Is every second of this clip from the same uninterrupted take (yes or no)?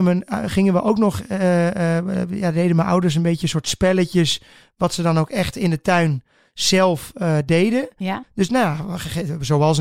yes